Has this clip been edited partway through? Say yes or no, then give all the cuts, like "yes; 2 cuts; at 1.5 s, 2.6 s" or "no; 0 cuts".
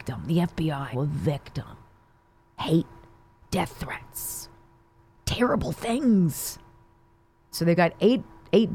yes; 2 cuts; at 0.9 s, 7.5 s